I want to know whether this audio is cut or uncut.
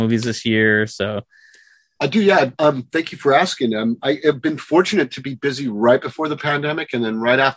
uncut